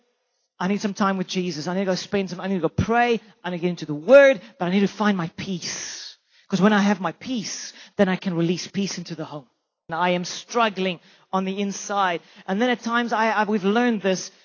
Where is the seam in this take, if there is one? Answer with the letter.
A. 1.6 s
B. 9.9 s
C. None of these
B